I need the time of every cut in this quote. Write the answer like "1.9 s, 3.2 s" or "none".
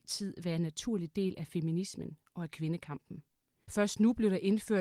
3.6 s